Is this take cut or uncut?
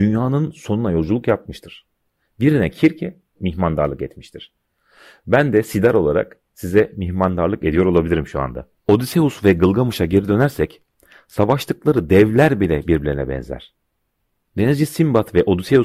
cut